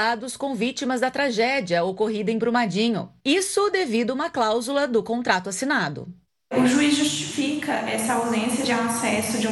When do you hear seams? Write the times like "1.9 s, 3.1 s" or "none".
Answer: 3.2 s